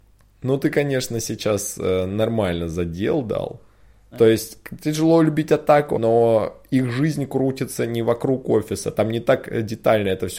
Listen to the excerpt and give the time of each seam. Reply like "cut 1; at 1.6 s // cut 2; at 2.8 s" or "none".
cut 1; at 4.1 s // cut 2; at 5.9 s